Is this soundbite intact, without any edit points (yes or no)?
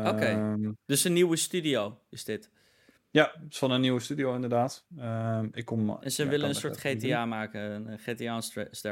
yes